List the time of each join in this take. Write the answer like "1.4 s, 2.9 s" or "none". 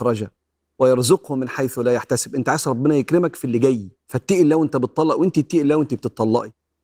4.0 s